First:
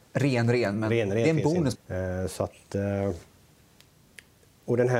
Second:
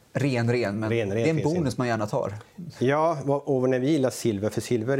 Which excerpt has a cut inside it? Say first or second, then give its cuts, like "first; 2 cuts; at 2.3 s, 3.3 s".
first; 1 cut; at 1.8 s